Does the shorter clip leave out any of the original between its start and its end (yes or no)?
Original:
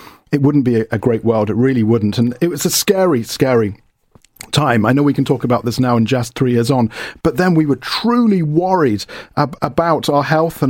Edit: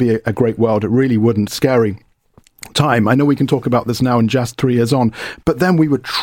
yes